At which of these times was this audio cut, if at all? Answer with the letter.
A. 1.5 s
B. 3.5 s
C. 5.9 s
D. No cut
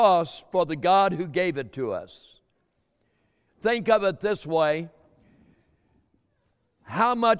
B